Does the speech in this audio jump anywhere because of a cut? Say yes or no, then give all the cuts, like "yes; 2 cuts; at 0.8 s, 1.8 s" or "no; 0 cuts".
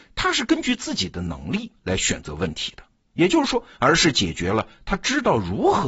yes; 1 cut; at 3.8 s